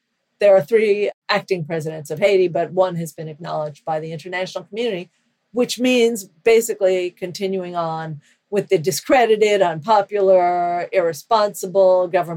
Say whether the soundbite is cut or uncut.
uncut